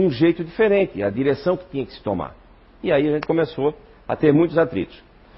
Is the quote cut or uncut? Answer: uncut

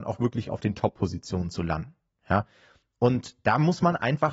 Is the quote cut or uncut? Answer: uncut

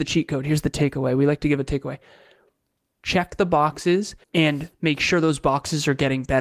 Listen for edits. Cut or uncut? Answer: cut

